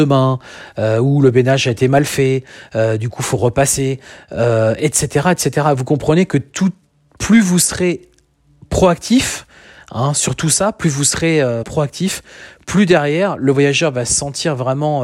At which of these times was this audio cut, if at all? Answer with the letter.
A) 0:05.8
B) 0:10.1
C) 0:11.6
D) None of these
C